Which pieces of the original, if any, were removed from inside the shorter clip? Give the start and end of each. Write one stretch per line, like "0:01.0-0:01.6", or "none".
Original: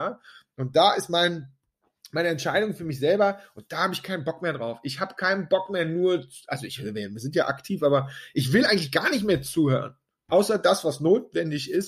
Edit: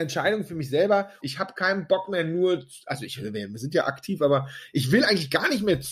0:03.5-0:04.8